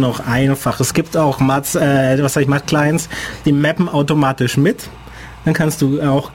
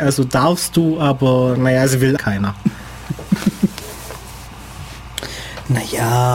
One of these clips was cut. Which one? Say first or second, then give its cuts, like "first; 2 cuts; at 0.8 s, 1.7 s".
second; 1 cut; at 2.2 s